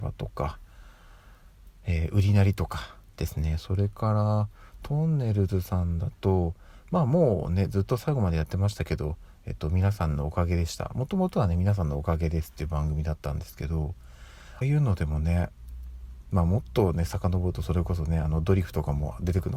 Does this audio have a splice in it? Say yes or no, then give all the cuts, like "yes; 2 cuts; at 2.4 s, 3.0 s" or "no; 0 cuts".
yes; 1 cut; at 14.6 s